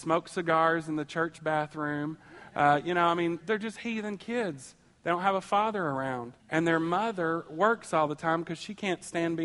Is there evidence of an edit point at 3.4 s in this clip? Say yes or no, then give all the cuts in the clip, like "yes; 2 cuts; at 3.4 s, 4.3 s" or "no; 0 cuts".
yes; 2 cuts; at 3.4 s, 6.4 s